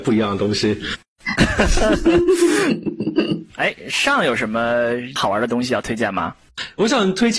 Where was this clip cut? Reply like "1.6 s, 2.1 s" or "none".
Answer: 1.4 s, 3.5 s